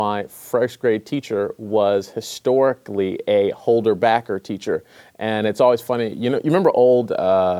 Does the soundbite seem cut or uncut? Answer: uncut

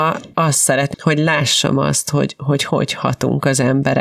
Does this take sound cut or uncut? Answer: cut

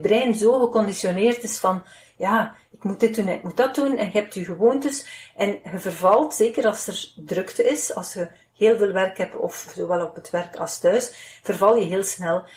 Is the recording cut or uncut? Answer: uncut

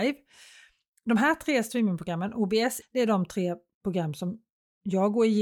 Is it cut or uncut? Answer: cut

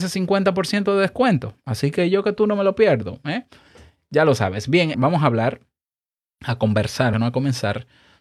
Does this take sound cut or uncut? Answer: cut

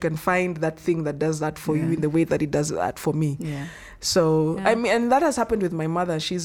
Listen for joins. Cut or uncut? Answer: uncut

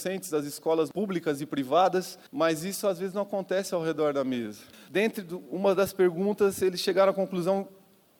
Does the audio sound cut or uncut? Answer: cut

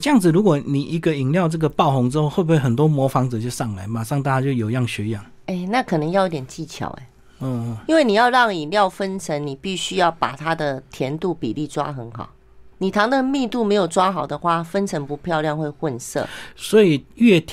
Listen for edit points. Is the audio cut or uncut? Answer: cut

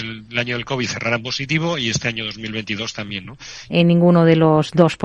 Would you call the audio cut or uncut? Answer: cut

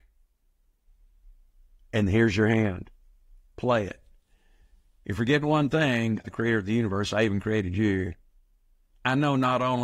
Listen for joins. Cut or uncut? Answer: cut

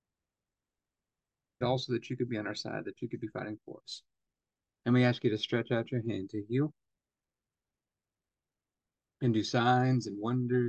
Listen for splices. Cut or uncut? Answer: cut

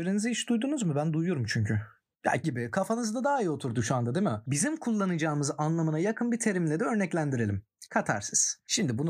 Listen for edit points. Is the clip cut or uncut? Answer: cut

